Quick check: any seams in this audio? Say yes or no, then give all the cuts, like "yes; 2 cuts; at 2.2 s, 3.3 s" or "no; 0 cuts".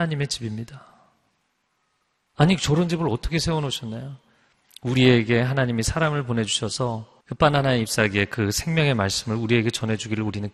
yes; 1 cut; at 7.2 s